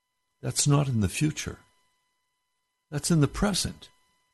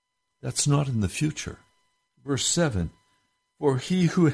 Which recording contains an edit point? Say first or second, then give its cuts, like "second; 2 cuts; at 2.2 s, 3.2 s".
second; 1 cut; at 2.1 s